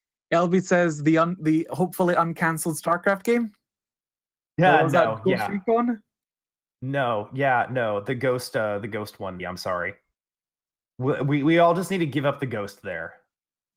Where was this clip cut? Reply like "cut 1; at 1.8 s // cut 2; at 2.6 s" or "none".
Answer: cut 1; at 9.4 s